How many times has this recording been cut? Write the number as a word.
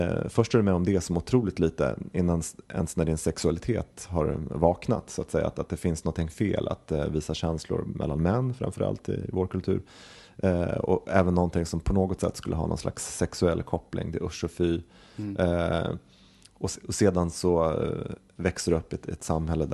zero